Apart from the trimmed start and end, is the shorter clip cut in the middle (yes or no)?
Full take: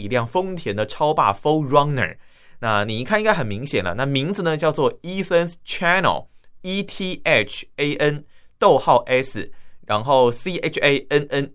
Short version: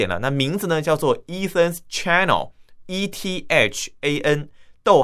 no